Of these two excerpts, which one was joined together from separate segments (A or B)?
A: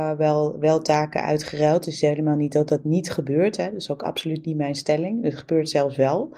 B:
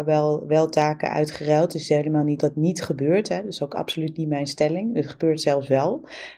B